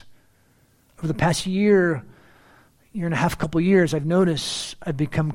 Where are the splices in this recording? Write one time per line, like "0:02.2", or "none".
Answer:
none